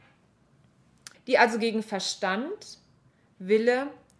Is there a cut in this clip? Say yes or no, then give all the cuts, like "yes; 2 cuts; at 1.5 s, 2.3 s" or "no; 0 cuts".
yes; 1 cut; at 1.1 s